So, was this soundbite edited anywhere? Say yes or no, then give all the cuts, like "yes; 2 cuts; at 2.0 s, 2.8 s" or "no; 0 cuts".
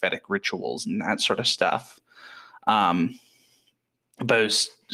no; 0 cuts